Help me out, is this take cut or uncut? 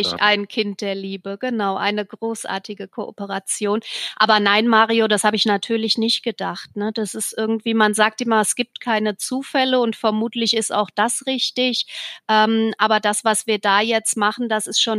uncut